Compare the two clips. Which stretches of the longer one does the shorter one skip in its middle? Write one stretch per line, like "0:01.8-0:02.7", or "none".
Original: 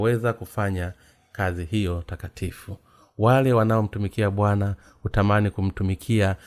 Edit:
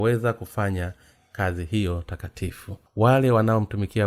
0:02.9-0:03.1